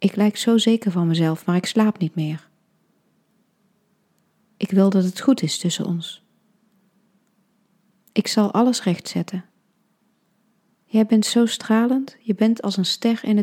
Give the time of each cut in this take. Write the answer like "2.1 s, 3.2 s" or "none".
none